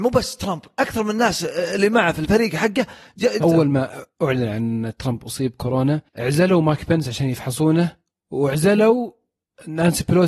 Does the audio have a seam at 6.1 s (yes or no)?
yes